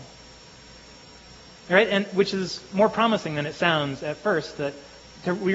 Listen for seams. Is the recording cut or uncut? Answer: uncut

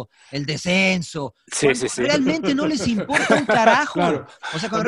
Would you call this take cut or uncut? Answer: uncut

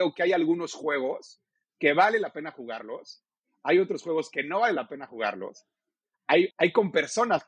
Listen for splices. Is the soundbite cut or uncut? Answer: cut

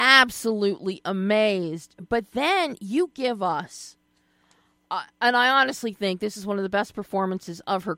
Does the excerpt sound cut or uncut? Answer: uncut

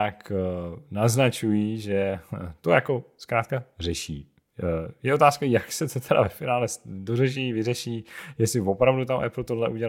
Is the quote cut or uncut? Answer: uncut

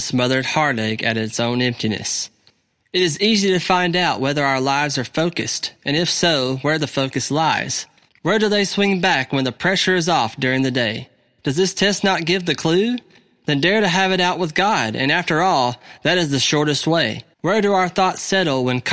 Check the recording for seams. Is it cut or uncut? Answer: cut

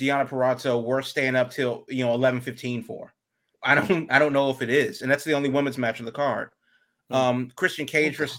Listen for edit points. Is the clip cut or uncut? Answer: cut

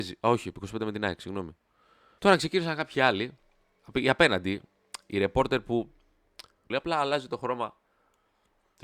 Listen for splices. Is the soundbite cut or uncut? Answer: cut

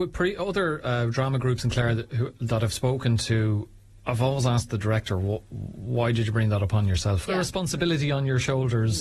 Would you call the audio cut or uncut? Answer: cut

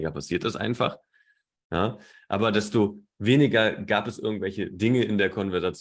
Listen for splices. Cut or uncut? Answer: uncut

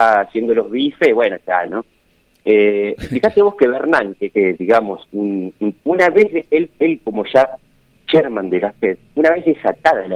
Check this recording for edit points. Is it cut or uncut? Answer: cut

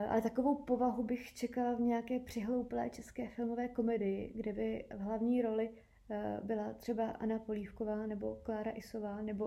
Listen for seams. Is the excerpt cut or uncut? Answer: uncut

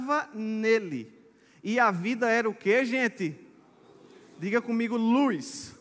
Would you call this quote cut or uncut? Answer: uncut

